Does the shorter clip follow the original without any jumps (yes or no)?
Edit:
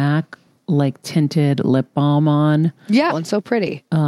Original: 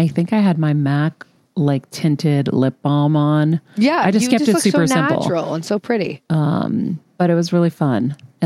no